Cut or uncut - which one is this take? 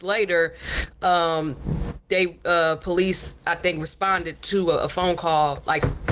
uncut